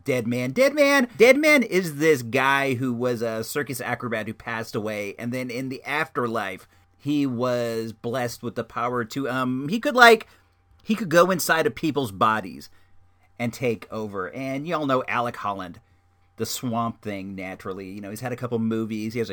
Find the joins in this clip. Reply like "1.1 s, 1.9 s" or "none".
none

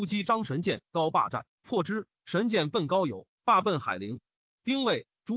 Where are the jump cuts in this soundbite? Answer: none

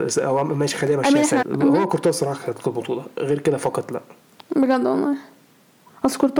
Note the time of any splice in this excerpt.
1.4 s

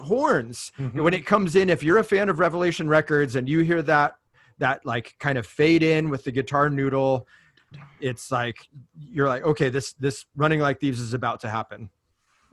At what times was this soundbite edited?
none

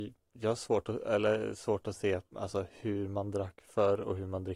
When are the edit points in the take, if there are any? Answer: none

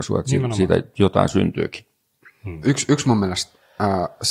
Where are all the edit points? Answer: 2.6 s

